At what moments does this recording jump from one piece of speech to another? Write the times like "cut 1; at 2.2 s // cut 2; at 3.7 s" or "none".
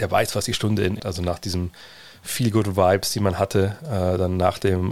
cut 1; at 1.0 s